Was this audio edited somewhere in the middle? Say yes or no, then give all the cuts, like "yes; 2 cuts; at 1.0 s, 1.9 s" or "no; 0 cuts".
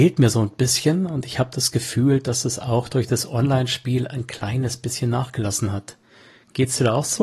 no; 0 cuts